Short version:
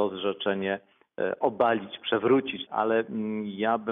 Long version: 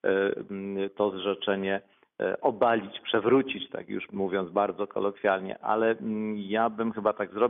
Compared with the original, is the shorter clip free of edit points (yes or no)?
no